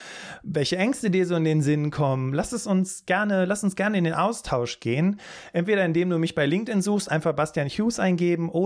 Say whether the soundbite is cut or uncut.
uncut